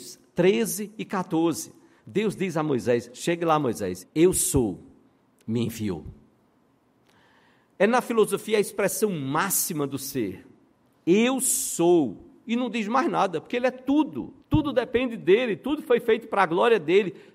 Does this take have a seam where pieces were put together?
yes; 2 cuts; at 4.0 s, 14.4 s

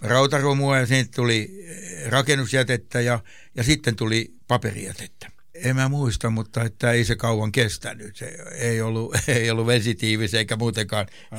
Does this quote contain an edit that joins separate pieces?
yes; 1 cut; at 5.5 s

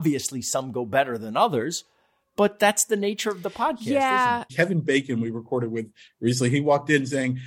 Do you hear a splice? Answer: yes; 1 cut; at 4.5 s

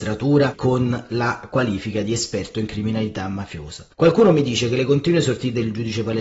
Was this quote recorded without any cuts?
no; 1 cut; at 3.9 s

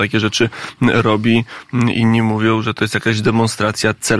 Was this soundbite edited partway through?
no; 0 cuts

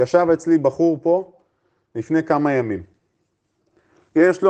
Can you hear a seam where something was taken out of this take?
no; 0 cuts

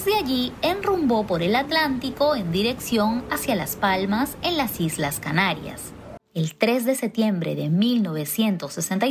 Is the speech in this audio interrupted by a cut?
yes; 1 cut; at 6.2 s

